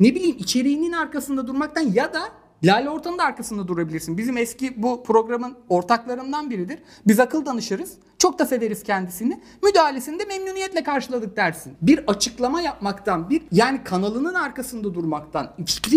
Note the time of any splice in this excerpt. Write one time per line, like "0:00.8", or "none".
0:11.7